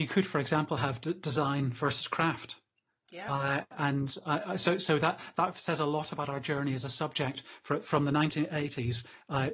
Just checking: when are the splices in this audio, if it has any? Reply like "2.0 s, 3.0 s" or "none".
none